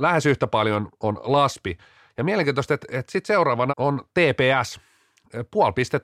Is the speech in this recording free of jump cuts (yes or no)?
no